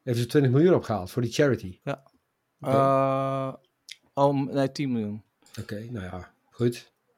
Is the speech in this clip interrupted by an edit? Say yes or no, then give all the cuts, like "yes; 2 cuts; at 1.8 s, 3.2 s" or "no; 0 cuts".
yes; 1 cut; at 1.8 s